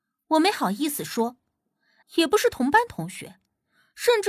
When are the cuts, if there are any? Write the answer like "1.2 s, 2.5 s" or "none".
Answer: 2.0 s

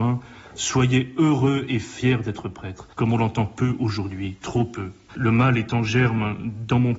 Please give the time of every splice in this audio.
2.9 s, 5.1 s

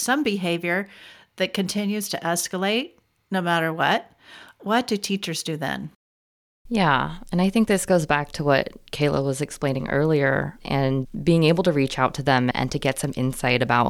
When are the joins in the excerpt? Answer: 10.6 s

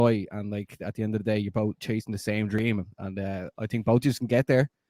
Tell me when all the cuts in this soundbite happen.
none

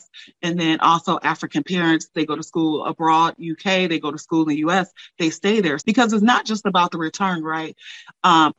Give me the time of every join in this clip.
2.1 s, 5.8 s

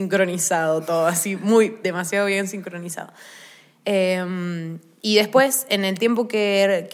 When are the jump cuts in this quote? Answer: none

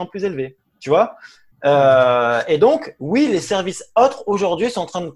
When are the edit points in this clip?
none

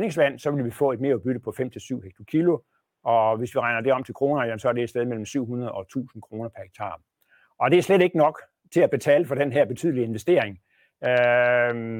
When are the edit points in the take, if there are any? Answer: none

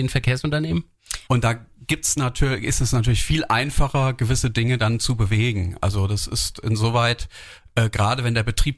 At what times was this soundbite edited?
1.3 s

